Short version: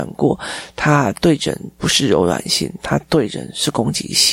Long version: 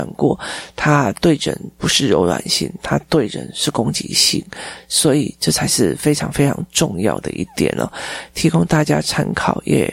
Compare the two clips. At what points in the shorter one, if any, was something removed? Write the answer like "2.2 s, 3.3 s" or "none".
none